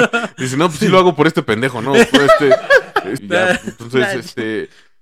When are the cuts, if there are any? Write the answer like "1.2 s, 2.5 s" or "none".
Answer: 3.2 s